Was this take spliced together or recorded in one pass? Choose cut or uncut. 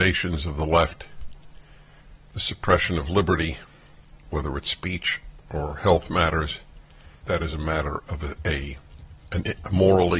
cut